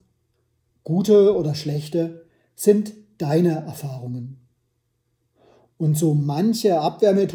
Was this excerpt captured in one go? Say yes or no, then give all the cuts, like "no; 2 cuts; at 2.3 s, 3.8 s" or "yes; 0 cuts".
yes; 0 cuts